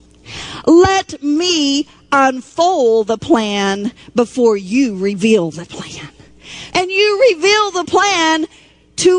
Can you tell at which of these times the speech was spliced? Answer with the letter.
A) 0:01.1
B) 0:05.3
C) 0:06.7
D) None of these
C